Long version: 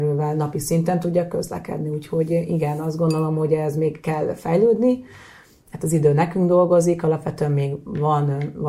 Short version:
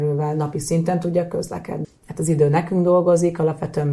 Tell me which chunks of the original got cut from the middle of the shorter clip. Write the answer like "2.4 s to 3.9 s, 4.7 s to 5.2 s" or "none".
1.8 s to 5.5 s